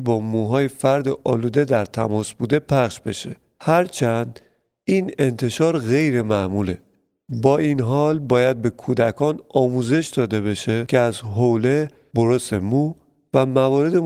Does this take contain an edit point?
no; 0 cuts

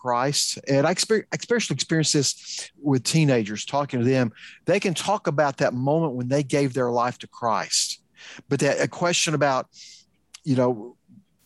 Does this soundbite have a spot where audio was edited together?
yes; 1 cut; at 2.7 s

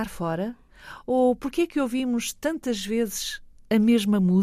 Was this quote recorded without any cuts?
yes; 0 cuts

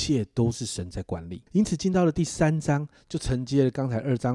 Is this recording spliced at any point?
yes; 1 cut; at 1.5 s

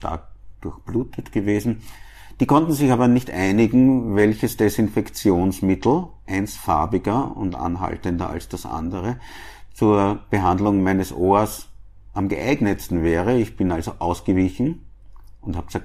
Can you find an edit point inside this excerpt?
no; 0 cuts

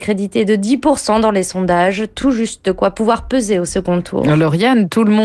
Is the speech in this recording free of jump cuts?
yes; 0 cuts

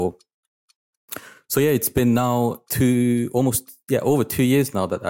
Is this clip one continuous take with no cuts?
yes; 0 cuts

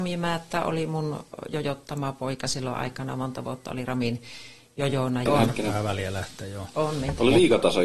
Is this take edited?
yes; 1 cut; at 5.3 s

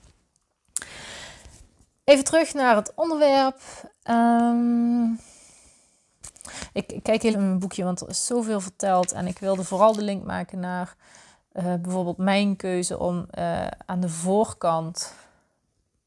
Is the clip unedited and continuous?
no; 1 cut; at 7.3 s

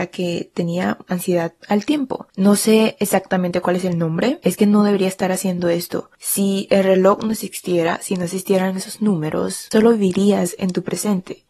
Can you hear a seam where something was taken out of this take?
yes; 3 cuts; at 2.3 s, 4.4 s, 6.2 s

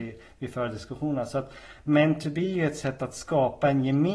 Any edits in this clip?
no; 0 cuts

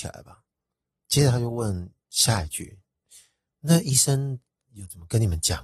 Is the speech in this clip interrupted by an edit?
yes; 1 cut; at 2.0 s

